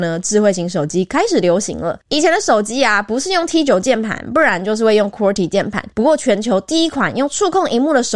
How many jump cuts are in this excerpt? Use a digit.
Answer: 2